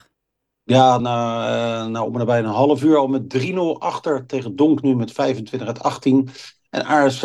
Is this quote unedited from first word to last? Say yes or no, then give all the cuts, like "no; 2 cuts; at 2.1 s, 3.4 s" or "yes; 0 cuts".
no; 2 cuts; at 1.0 s, 4.8 s